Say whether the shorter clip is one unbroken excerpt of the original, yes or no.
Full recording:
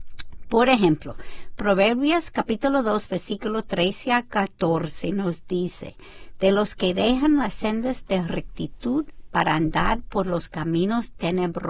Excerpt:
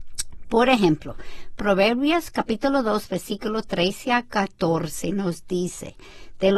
yes